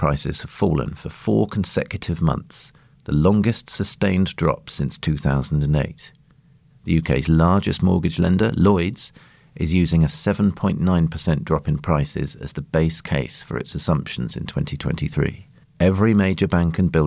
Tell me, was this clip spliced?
yes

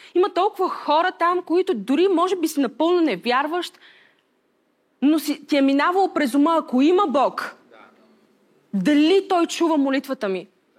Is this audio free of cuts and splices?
yes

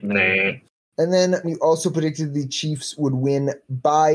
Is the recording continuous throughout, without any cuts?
no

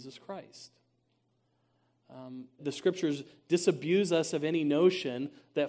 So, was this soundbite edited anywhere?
yes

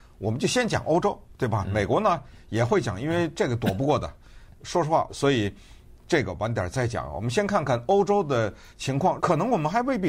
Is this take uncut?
no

